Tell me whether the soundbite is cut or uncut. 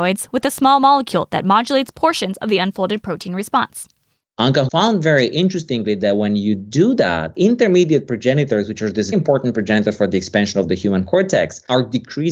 cut